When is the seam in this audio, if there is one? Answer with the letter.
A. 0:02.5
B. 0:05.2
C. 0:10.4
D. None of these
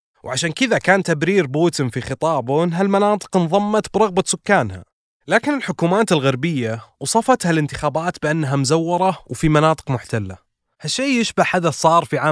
D